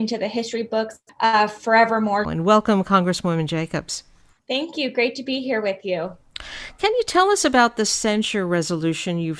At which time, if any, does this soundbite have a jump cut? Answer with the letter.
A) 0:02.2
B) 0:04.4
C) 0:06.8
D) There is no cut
A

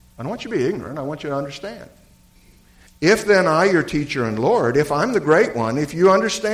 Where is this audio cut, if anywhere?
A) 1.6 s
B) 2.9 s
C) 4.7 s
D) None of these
B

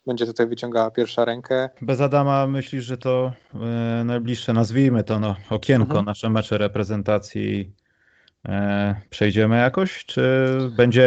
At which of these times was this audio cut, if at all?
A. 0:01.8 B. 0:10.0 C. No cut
A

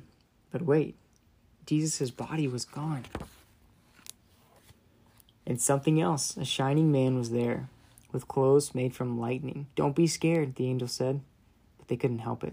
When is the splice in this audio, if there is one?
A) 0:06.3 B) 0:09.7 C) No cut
B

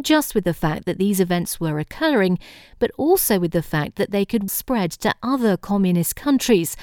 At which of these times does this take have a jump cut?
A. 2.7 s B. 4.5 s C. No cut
B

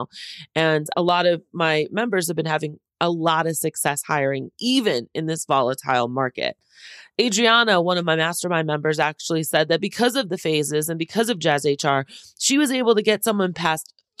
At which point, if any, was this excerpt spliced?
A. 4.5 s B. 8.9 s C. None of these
C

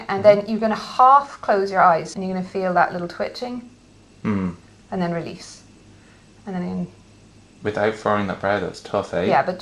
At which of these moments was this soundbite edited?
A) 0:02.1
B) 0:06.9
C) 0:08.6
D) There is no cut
A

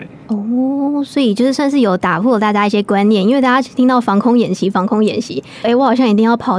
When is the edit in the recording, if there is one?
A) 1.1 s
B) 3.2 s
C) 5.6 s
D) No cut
C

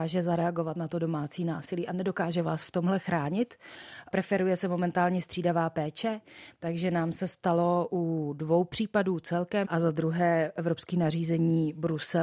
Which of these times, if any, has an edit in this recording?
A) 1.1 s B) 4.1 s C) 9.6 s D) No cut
C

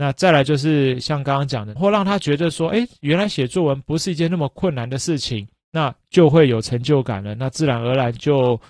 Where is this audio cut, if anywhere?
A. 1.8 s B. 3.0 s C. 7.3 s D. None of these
A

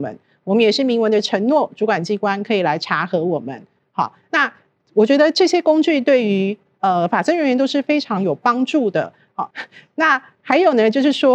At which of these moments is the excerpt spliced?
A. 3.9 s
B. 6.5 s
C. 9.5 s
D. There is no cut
C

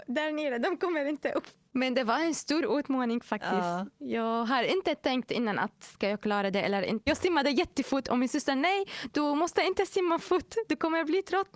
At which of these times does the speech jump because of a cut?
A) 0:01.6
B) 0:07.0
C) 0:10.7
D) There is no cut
B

